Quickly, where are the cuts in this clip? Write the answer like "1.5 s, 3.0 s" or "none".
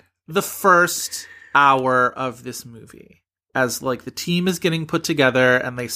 none